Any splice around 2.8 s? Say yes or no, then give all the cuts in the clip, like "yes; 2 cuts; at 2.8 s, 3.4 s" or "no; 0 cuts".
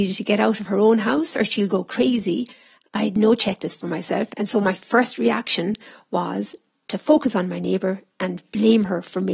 yes; 1 cut; at 2.8 s